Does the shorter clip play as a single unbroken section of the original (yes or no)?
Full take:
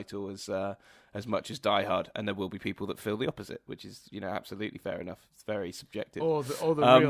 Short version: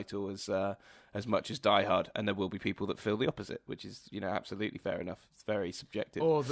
yes